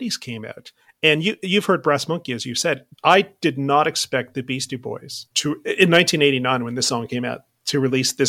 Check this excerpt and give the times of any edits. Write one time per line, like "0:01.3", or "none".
0:02.9
0:05.3